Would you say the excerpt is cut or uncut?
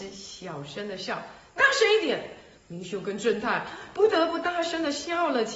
uncut